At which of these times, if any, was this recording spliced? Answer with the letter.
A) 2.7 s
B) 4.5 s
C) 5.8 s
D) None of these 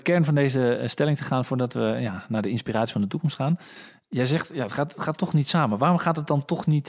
D